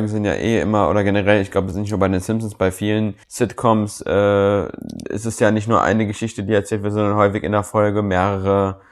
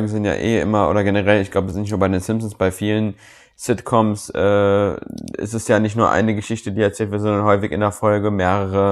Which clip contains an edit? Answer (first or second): first